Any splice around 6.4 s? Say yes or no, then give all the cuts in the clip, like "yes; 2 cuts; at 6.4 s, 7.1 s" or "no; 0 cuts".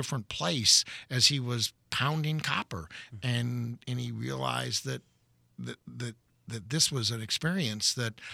no; 0 cuts